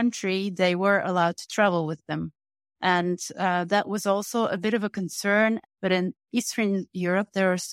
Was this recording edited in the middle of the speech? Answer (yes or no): yes